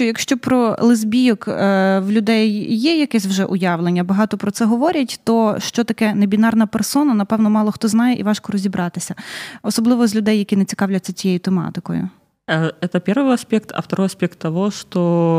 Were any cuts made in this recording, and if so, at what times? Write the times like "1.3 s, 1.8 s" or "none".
none